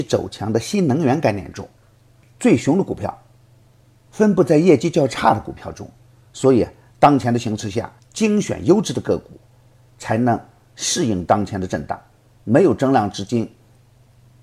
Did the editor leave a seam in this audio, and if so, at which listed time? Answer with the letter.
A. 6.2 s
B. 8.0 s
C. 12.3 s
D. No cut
B